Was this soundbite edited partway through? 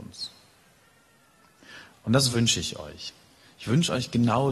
no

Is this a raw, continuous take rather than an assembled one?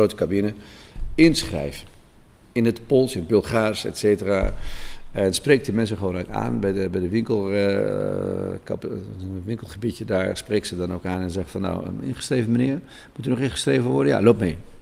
yes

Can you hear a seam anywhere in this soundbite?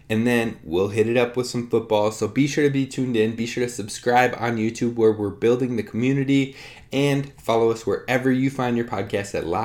no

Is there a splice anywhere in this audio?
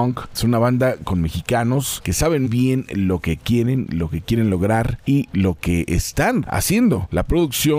yes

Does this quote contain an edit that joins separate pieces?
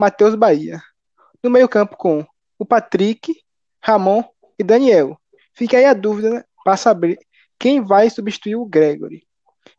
no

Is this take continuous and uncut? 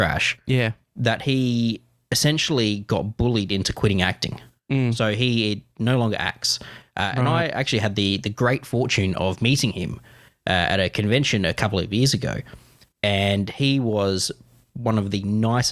yes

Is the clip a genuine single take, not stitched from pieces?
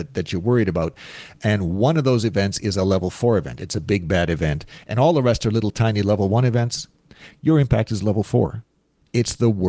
yes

